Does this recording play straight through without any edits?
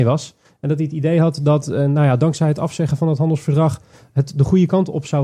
yes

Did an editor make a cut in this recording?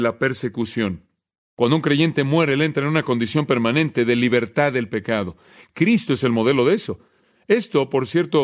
no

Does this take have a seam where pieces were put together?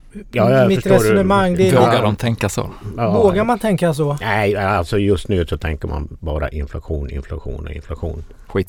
no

